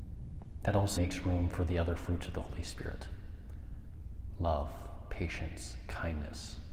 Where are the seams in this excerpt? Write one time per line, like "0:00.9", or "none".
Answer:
0:01.0